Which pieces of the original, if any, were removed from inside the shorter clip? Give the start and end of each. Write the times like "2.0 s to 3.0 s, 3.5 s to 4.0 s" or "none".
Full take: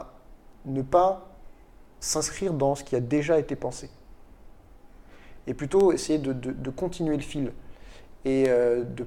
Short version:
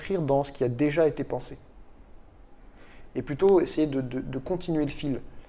none